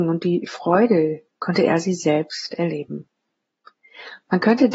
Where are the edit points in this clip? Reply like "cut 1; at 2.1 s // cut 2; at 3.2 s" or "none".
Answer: cut 1; at 1.3 s

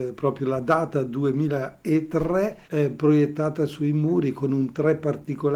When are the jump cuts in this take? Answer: cut 1; at 2.6 s

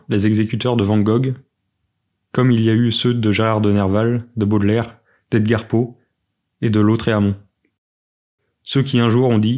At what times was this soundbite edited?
none

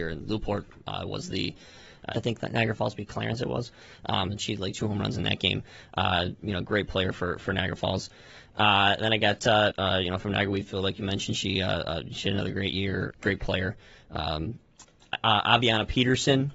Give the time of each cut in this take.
cut 1; at 2.1 s // cut 2; at 9.7 s // cut 3; at 13.1 s

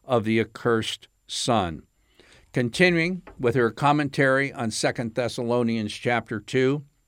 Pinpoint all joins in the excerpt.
none

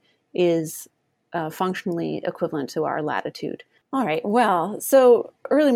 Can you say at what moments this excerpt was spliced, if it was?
cut 1; at 3.8 s

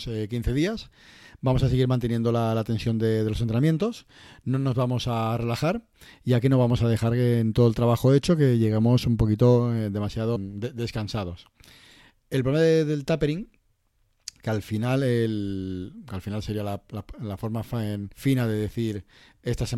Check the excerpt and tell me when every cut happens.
cut 1; at 10.4 s // cut 2; at 18.1 s

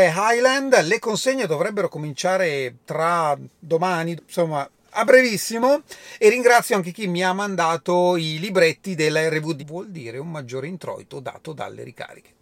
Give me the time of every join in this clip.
cut 1; at 4.2 s // cut 2; at 9.6 s

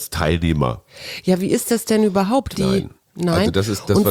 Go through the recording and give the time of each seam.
cut 1; at 2.6 s

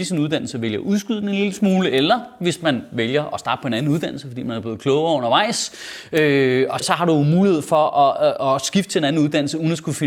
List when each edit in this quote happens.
cut 1; at 6.8 s

